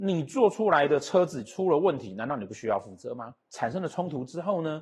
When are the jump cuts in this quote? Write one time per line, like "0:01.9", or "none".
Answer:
0:03.4

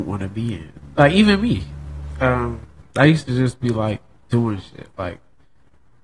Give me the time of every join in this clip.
0:02.8

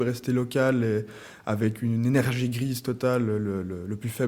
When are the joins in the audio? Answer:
none

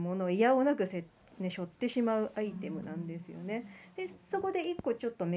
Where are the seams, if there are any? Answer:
none

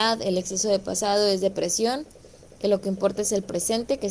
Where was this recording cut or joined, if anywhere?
none

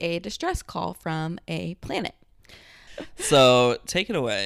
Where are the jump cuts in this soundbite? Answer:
0:02.9

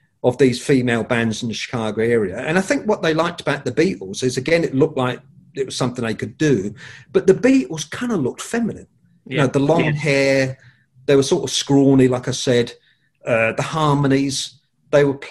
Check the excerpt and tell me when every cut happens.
none

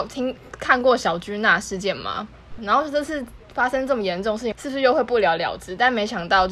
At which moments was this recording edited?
0:02.6
0:04.5

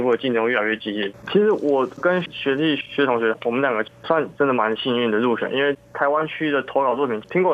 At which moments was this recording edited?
0:01.1

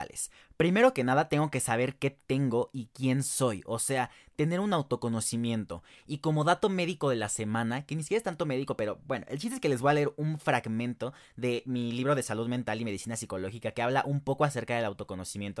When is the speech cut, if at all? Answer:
none

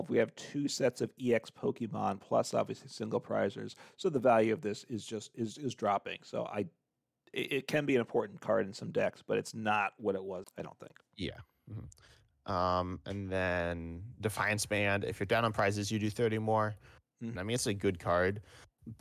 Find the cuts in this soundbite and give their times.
0:10.4
0:17.4

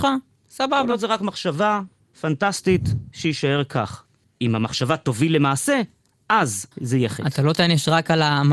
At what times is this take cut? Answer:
0:04.2
0:06.7

